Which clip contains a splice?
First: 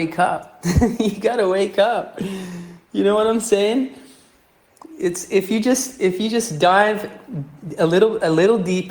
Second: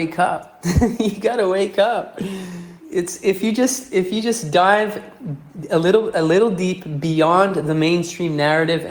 second; 1 cut; at 2.8 s

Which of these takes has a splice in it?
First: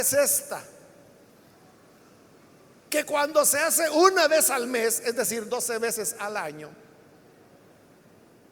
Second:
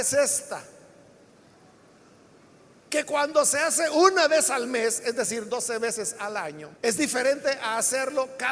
second; 1 cut; at 6.8 s

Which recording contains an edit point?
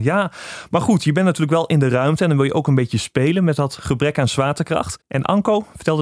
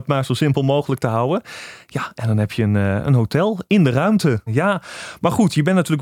second; 1 cut; at 4.5 s

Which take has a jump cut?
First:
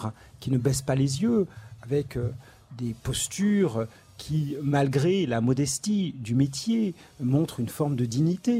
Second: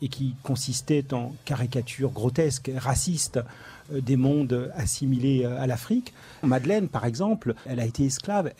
second; 2 cuts; at 6.4 s, 7.7 s

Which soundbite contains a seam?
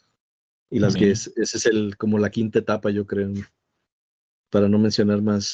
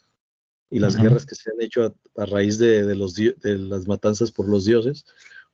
first; 1 cut; at 1.0 s

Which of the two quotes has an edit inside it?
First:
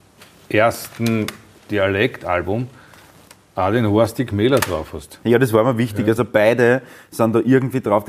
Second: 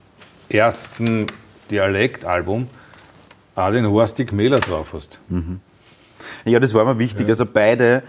first; 1 cut; at 5.2 s

